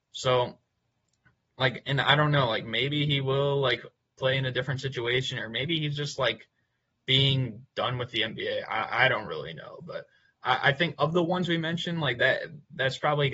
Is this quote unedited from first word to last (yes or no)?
yes